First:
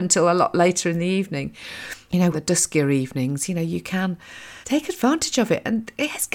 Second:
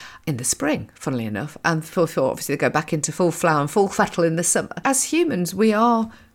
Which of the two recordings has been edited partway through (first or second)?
first